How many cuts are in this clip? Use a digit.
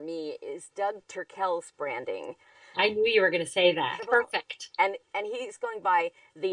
1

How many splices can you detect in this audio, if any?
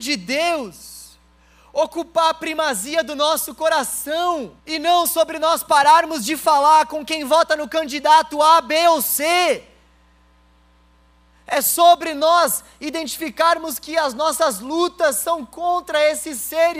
1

